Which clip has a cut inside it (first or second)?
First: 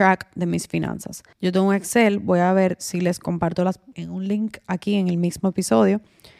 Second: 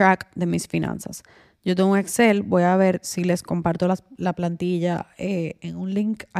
first